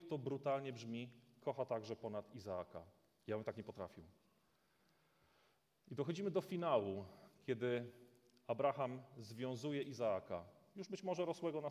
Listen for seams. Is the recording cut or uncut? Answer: uncut